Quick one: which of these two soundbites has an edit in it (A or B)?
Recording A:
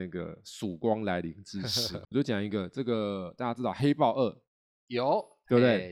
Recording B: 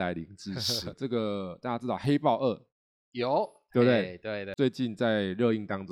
B